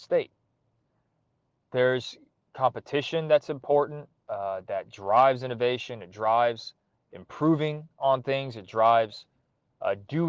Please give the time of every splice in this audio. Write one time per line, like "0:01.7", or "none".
none